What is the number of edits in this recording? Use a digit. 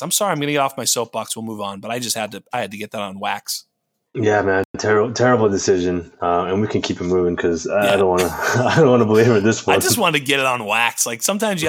0